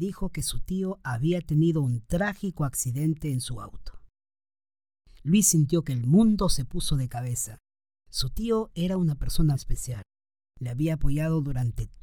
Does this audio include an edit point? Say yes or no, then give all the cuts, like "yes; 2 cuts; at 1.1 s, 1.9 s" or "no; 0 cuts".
yes; 1 cut; at 9.5 s